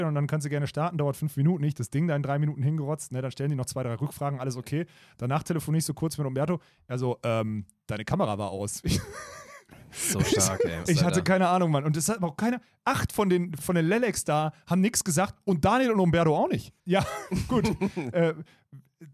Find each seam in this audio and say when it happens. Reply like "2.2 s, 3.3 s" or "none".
10.9 s, 13.6 s, 16.8 s